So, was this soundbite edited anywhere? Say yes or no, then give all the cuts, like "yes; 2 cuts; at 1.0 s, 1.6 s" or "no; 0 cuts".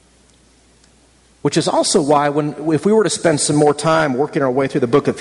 no; 0 cuts